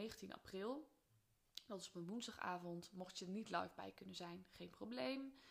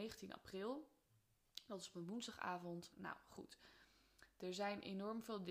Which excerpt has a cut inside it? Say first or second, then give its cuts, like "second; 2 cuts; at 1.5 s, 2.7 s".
second; 1 cut; at 2.9 s